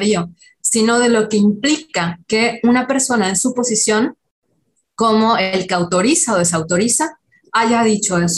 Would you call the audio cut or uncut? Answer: uncut